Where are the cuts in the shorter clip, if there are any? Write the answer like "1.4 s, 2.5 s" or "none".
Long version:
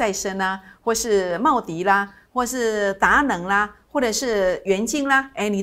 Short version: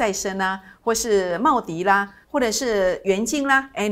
2.2 s